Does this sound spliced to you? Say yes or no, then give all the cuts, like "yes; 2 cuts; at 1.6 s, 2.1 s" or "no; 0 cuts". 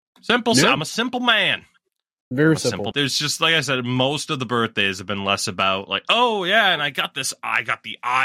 yes; 1 cut; at 2.9 s